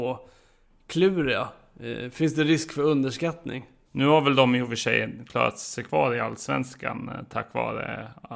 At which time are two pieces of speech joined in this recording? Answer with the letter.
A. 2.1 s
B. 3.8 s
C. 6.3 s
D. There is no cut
B